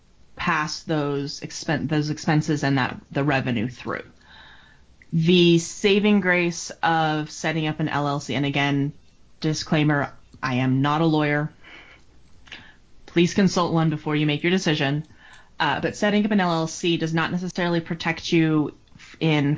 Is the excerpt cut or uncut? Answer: cut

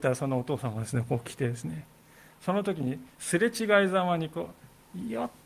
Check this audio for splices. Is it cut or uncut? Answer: uncut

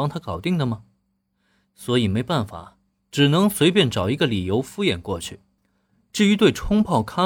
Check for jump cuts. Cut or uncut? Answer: uncut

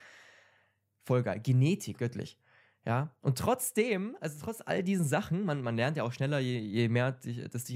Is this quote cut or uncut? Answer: cut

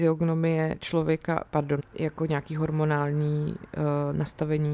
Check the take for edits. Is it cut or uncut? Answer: cut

